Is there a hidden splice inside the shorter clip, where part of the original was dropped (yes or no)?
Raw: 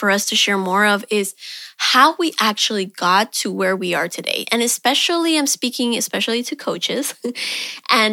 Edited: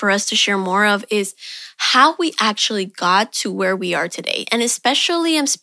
no